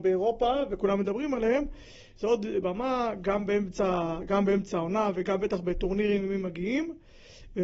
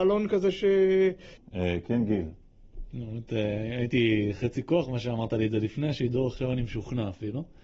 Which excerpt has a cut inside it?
second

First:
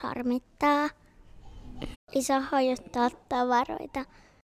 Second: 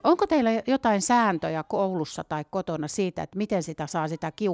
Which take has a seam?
first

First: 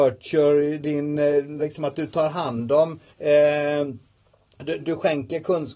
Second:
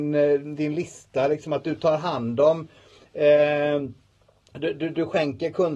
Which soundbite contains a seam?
first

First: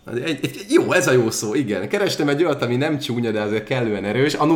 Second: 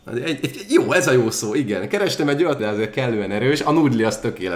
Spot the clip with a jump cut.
second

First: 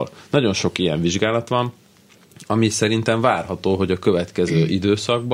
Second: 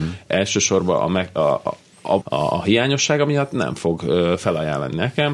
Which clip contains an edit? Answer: second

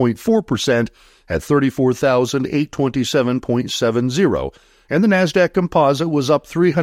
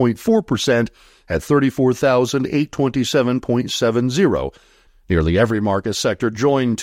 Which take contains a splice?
second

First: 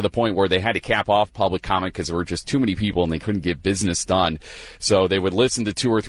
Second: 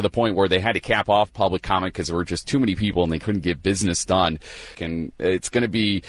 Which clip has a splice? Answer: second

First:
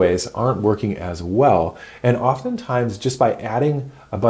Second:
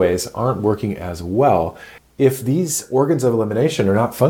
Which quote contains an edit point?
second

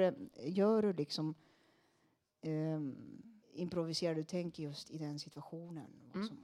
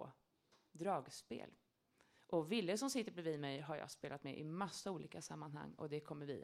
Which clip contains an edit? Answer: first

